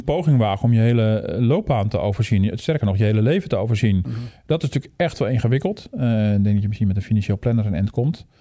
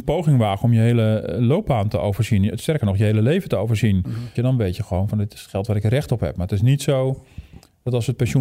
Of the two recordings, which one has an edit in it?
second; 1 cut; at 4.3 s

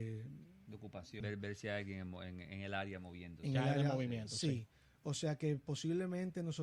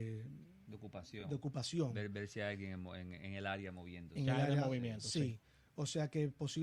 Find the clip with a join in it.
first; 1 cut; at 1.2 s

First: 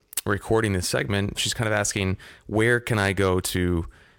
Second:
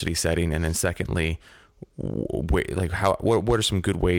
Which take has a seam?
first; 1 cut; at 1.3 s

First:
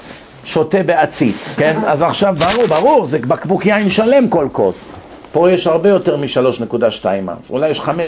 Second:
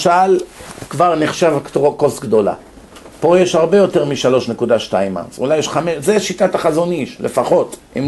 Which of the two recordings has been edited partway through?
first; 2 cuts; at 1.6 s, 5.3 s

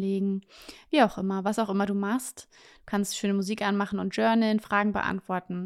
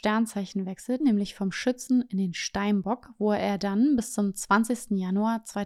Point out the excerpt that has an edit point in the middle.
second; 1 cut; at 1.0 s

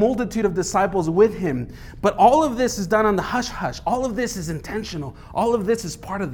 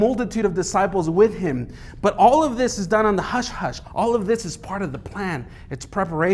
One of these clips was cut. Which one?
second; 1 cut; at 3.8 s

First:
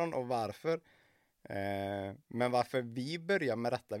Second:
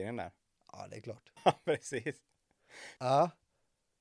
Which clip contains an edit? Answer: second; 2 cuts; at 1.4 s, 3.0 s

